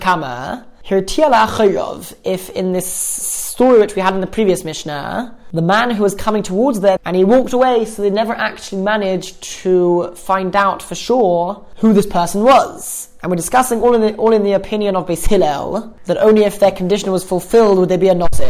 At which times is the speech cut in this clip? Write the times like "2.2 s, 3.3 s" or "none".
7.0 s